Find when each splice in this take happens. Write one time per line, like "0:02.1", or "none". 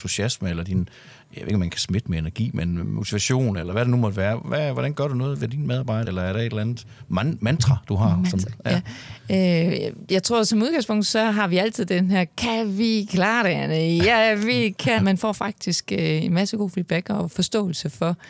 0:06.0
0:15.0